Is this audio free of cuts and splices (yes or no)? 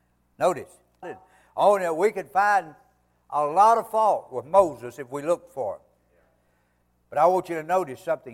no